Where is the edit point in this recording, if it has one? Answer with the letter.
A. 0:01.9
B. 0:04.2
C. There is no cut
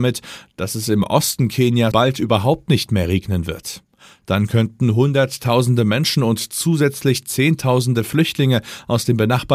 A